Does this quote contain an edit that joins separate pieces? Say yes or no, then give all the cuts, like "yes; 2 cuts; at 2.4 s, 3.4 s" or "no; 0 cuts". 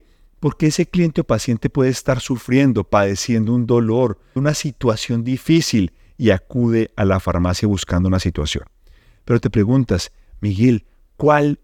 yes; 1 cut; at 4.4 s